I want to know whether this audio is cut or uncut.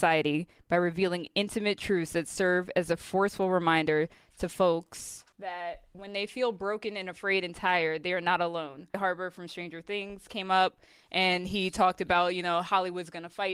cut